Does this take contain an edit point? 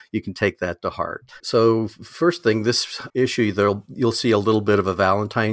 yes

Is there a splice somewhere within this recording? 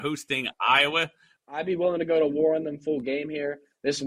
yes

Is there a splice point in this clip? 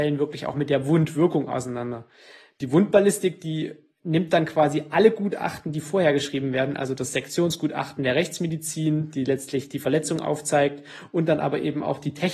no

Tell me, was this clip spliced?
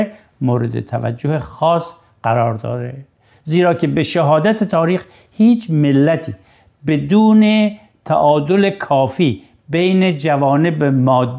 no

